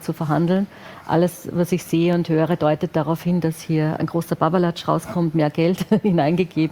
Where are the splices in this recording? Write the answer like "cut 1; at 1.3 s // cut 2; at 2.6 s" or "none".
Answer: cut 1; at 4.0 s